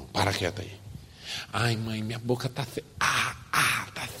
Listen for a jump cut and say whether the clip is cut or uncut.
uncut